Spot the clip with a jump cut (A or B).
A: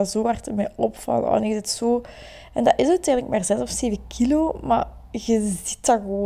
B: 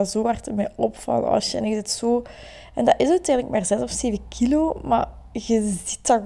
A